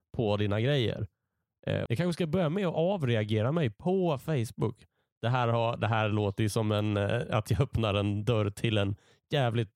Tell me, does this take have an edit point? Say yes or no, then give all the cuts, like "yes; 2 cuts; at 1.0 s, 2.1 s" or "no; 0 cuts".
yes; 1 cut; at 1.9 s